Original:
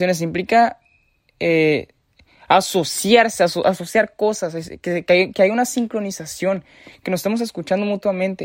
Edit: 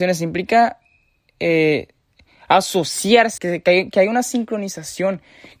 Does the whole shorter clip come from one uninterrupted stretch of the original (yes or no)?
no